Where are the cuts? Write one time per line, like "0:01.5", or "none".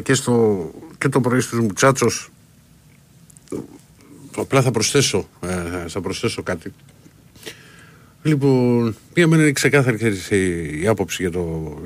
none